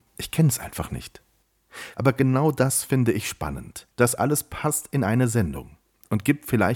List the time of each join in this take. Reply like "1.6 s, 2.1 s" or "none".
1.9 s, 3.9 s